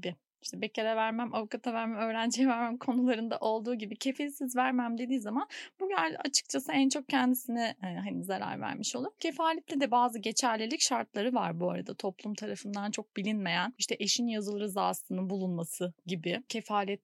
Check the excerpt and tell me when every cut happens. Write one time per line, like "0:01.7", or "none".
none